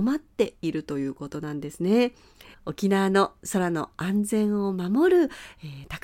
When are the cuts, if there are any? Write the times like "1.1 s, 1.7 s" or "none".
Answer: 2.5 s